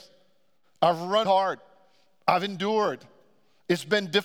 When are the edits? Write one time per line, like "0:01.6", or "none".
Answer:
0:01.3

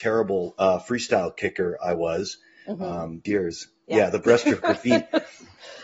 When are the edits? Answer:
0:03.3

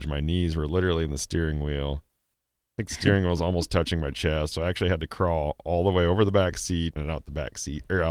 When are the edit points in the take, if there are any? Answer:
0:04.5
0:07.0

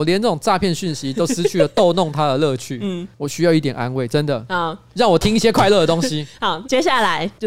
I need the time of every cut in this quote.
0:03.1

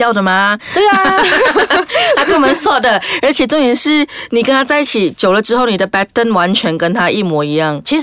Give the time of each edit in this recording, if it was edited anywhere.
none

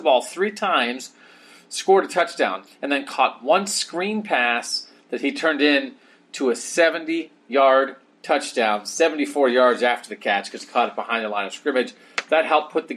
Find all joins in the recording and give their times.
0:02.7

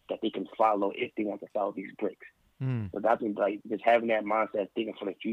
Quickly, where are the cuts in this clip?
0:03.6

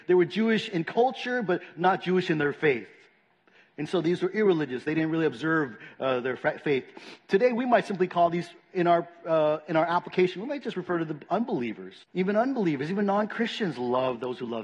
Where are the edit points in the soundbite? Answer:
0:12.0

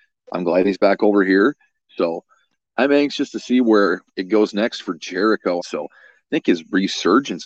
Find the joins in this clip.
0:01.9
0:05.6

